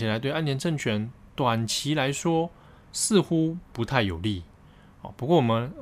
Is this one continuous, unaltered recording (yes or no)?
yes